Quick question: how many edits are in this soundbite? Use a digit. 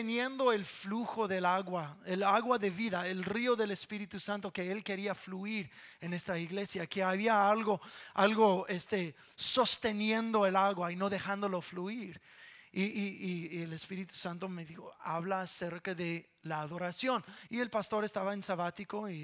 1